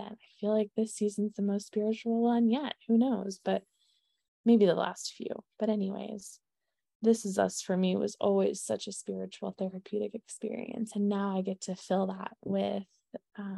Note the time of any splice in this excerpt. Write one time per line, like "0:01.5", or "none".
none